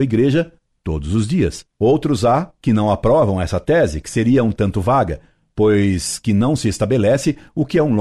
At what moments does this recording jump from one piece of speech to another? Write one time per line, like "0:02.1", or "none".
none